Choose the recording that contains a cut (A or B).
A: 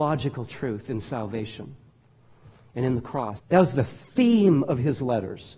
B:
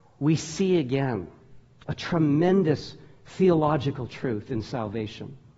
A